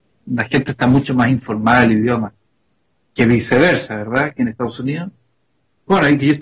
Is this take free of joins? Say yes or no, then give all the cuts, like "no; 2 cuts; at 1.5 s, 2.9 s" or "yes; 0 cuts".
yes; 0 cuts